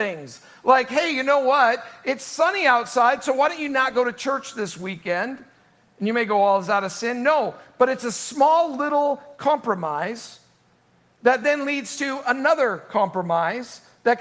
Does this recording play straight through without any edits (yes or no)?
yes